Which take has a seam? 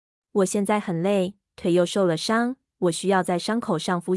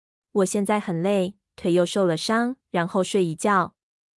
second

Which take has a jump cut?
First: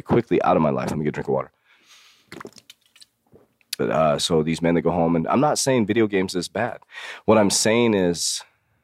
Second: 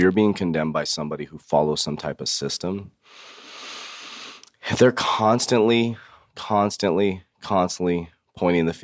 first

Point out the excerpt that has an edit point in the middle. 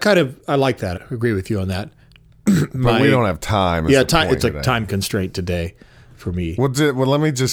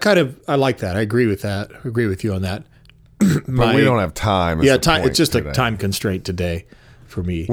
first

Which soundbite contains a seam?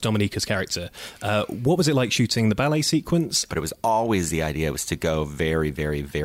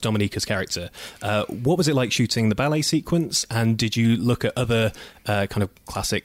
first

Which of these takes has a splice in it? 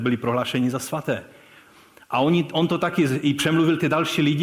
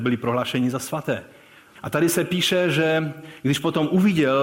second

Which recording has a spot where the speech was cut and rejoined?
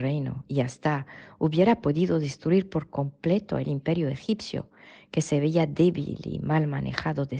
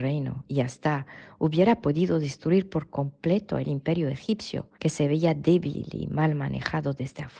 second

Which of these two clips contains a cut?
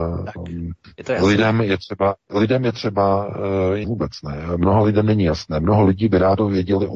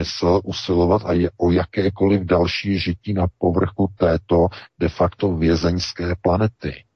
first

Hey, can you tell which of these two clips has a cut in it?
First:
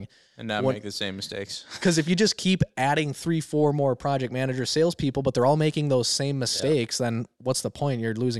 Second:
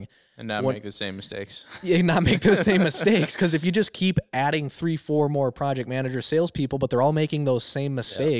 first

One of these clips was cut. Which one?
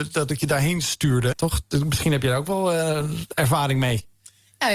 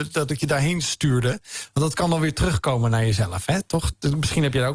first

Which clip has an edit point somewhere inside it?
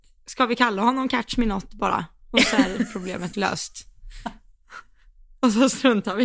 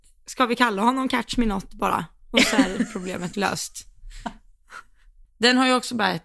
second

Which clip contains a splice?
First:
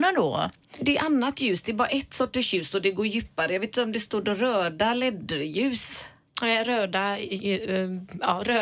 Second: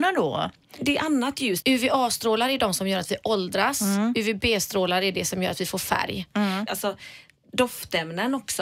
second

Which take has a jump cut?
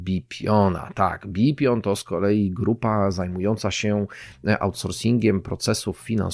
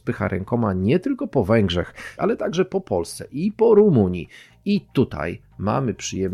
second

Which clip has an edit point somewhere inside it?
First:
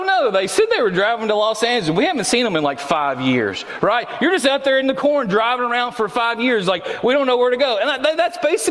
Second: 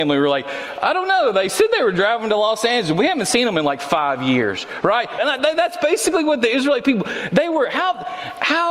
second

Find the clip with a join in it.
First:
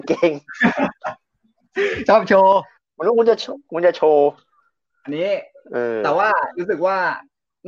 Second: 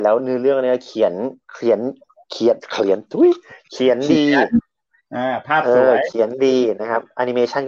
second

